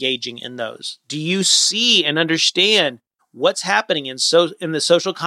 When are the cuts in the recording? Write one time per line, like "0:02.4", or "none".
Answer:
none